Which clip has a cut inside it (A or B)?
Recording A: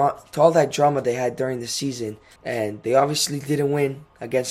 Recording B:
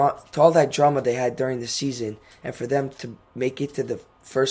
A